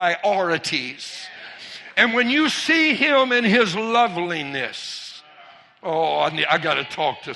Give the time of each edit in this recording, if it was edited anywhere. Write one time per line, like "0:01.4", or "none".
none